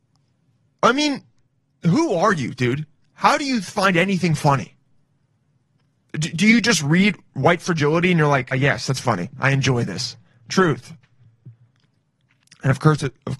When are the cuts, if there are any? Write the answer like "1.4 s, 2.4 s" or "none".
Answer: 8.5 s